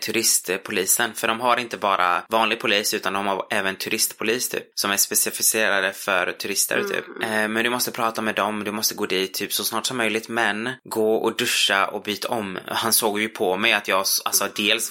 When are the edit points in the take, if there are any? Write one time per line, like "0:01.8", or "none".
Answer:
none

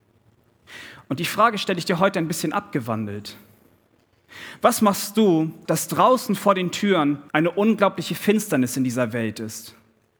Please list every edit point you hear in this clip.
0:05.7
0:07.3

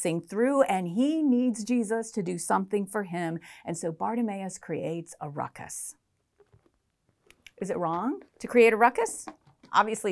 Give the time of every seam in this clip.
0:08.3

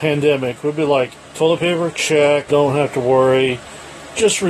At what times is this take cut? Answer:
0:02.5

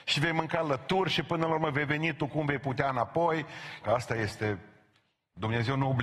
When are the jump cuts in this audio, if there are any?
0:03.8

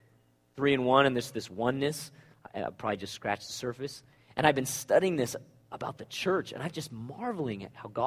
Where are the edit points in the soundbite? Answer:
none

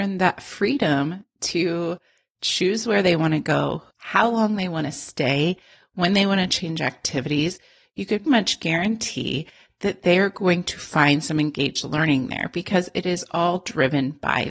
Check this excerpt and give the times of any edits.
0:03.9
0:08.3

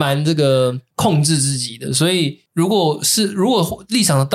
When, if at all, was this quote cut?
none

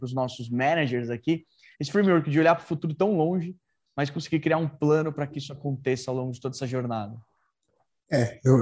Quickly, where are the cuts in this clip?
0:01.8

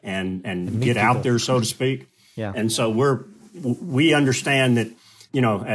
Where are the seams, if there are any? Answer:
none

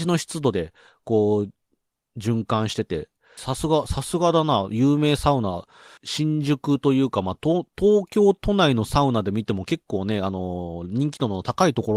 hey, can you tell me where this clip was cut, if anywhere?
0:03.4
0:06.0

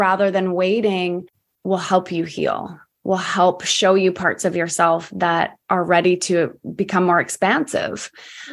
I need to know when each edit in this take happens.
0:01.6

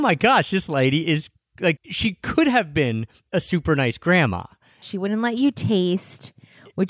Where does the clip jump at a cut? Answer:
0:01.8
0:04.8

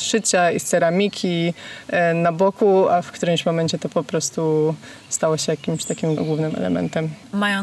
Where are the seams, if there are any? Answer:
0:06.2

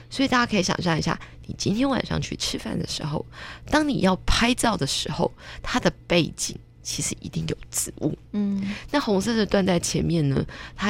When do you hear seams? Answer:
0:08.3

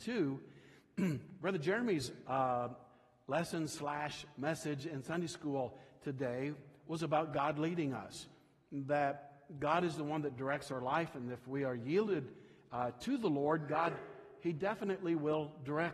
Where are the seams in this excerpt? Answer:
none

